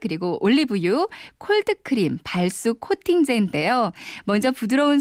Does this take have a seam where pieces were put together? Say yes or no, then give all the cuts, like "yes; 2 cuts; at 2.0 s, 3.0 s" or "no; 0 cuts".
no; 0 cuts